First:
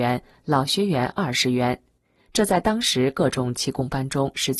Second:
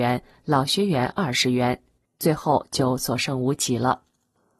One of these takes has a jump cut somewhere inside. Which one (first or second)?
second